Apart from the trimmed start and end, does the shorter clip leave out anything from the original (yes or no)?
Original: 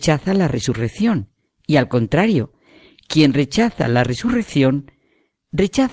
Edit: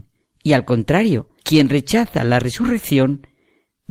yes